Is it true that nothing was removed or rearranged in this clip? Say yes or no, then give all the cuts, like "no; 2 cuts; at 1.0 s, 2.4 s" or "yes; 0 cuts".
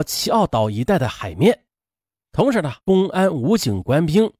no; 1 cut; at 2.8 s